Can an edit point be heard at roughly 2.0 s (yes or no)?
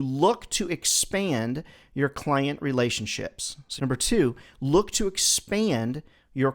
no